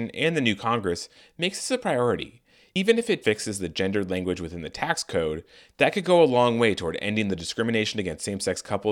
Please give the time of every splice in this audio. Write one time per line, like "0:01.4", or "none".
0:03.2